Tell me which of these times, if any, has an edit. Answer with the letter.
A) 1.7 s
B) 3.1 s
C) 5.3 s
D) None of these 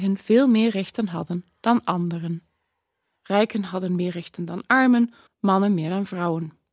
C